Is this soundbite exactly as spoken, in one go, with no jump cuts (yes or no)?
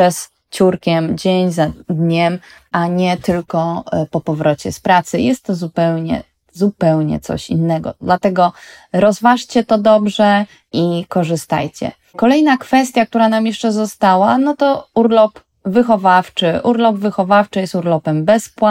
yes